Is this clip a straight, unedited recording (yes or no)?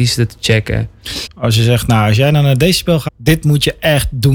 no